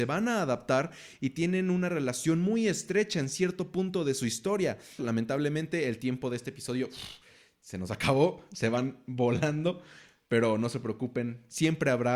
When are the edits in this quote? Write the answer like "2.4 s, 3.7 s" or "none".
5.0 s